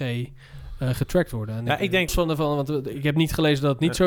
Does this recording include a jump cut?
yes; 1 cut; at 2.1 s

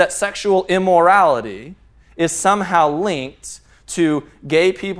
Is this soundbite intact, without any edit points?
yes; 0 cuts

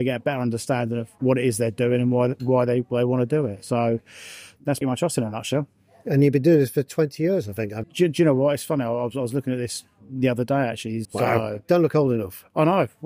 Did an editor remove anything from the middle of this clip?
yes; 3 cuts; at 4.8 s, 7.8 s, 11.0 s

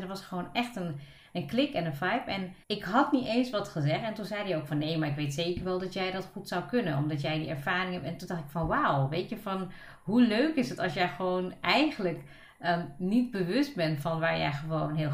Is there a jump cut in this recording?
yes; 1 cut; at 2.6 s

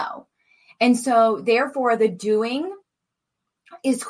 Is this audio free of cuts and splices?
yes; 0 cuts

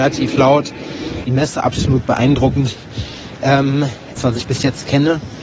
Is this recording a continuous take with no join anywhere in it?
no; 2 cuts; at 1.2 s, 4.2 s

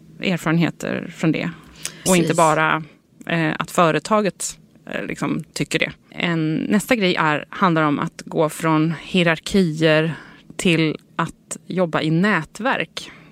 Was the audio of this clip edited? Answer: yes; 1 cut; at 2.1 s

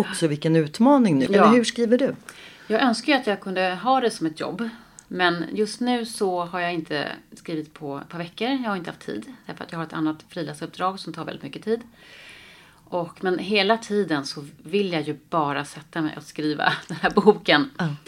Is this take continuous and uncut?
no; 1 cut; at 1.3 s

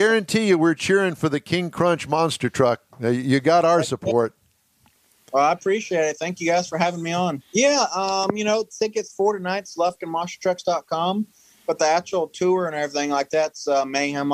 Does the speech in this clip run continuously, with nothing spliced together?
no; 1 cut; at 7.4 s

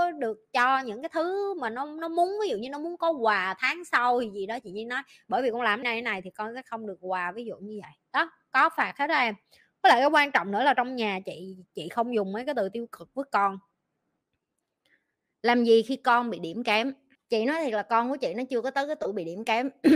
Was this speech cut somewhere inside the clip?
yes; 1 cut; at 5.8 s

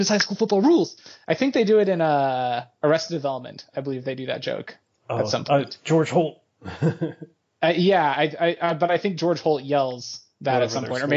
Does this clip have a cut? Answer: no; 0 cuts

